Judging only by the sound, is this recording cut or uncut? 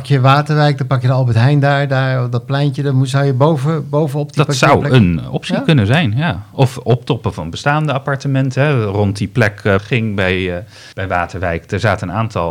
cut